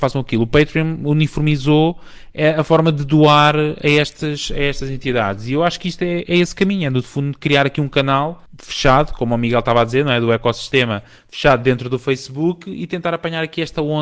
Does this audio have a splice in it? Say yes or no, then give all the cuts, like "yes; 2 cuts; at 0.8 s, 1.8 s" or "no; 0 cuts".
no; 0 cuts